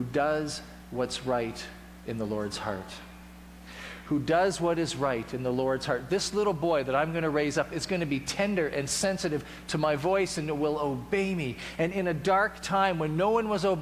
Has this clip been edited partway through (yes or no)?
no